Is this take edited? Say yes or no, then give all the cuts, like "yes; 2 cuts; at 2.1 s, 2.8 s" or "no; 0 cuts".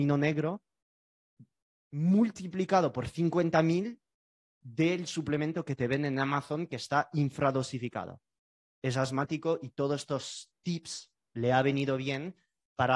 yes; 1 cut; at 8.6 s